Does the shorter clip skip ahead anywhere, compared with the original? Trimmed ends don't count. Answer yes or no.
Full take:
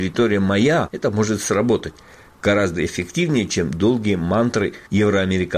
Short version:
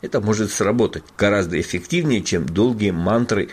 yes